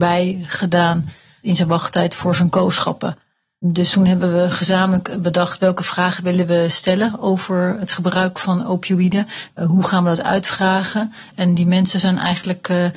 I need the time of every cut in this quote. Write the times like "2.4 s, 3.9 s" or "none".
9.5 s, 11.3 s

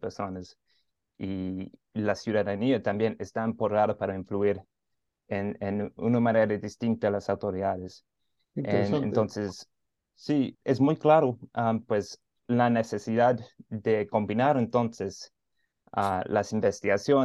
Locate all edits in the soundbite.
10.5 s, 11.8 s

